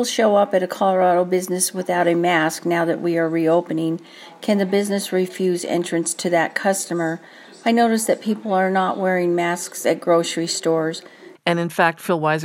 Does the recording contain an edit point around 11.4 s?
yes; 1 cut; at 11.4 s

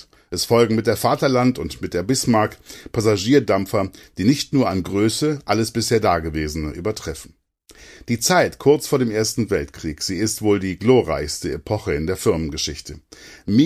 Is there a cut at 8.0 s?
no; 0 cuts

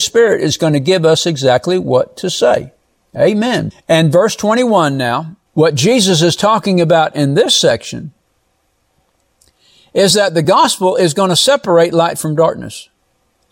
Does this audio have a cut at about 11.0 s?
no; 2 cuts; at 3.7 s, 5.5 s

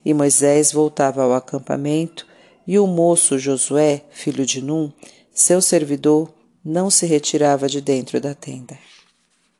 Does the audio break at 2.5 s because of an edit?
no; 0 cuts

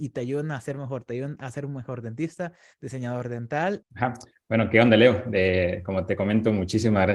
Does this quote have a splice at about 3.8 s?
yes; 1 cut; at 3.8 s

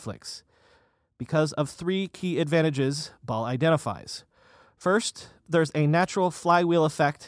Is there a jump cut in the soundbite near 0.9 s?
no; 0 cuts

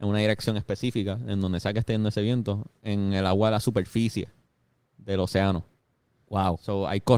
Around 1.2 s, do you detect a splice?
no; 0 cuts

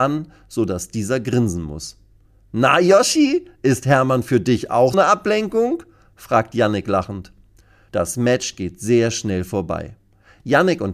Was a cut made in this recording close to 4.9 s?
yes; 2 cuts; at 4.9 s, 7.9 s

